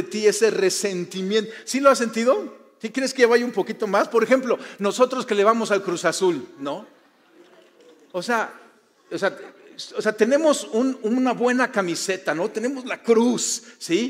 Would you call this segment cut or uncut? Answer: cut